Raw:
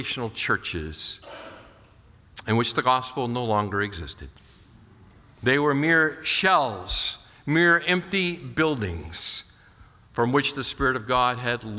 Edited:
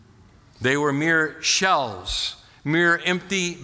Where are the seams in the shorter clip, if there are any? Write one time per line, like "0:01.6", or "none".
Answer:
none